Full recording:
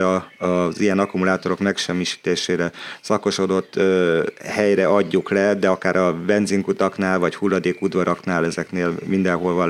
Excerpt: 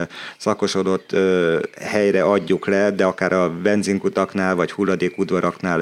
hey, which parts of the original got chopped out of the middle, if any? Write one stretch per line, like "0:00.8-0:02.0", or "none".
none